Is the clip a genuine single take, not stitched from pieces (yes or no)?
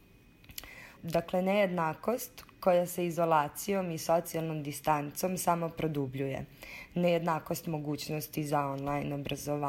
no